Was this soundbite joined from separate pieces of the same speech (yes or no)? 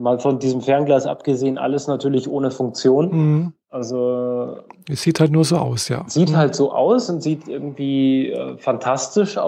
no